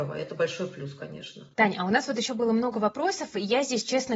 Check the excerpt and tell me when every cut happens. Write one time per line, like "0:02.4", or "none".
none